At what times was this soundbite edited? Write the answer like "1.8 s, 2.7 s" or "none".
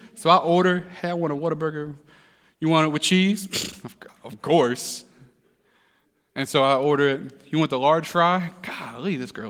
none